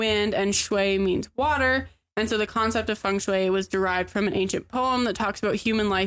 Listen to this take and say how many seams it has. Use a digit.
0